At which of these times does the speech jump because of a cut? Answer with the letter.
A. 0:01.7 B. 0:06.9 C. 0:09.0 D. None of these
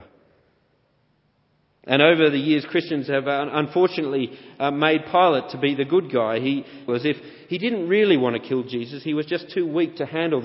B